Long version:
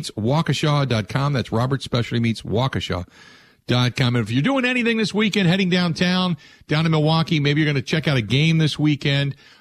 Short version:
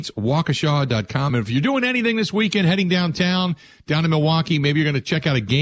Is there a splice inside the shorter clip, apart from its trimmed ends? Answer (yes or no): yes